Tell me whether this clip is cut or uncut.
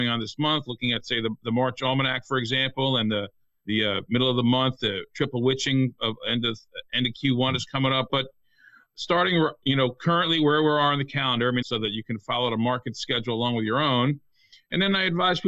cut